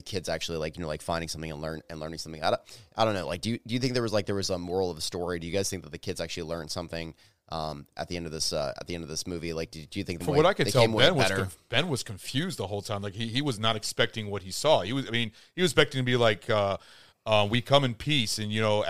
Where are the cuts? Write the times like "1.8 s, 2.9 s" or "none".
10.2 s